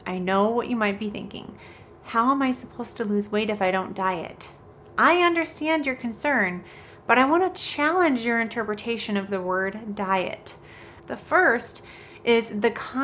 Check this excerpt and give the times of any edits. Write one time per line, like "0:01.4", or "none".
0:11.0